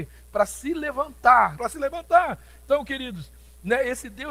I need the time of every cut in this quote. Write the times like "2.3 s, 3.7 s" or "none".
1.6 s